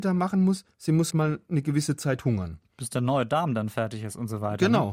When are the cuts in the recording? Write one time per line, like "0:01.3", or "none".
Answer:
0:01.1